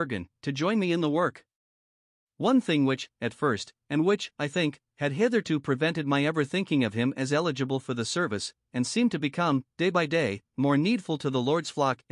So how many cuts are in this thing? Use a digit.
2